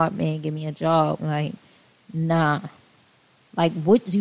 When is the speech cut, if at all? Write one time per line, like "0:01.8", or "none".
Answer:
0:01.2